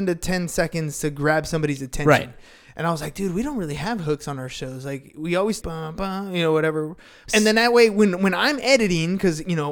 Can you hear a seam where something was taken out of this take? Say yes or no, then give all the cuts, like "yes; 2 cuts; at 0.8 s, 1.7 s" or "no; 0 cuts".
yes; 2 cuts; at 5.6 s, 7.3 s